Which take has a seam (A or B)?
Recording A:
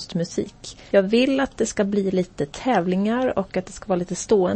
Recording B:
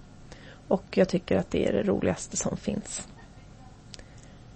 A